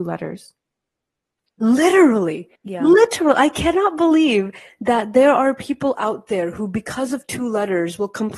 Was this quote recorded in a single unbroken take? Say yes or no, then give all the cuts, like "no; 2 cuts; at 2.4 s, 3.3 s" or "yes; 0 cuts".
no; 1 cut; at 2.6 s